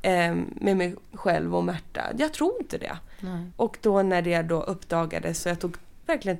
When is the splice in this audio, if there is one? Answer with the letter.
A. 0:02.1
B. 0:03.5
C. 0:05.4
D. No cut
B